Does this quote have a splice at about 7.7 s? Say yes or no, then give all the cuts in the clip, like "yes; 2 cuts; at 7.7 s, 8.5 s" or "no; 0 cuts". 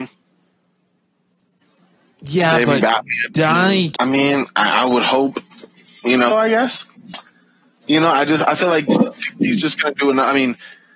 no; 2 cuts; at 4.0 s, 6.3 s